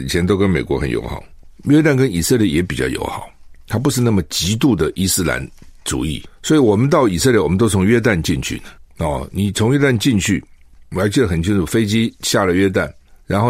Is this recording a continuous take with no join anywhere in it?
yes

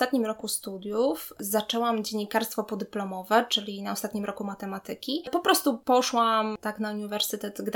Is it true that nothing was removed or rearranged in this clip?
yes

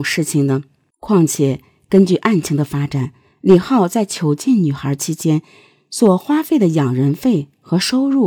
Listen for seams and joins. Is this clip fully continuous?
no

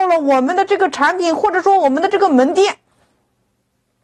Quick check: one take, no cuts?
yes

